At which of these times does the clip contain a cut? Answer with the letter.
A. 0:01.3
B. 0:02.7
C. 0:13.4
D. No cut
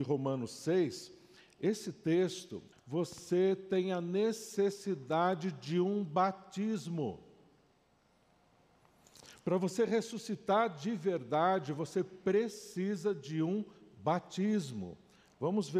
B